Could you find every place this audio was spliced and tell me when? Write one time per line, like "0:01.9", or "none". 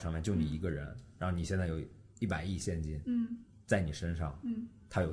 0:02.1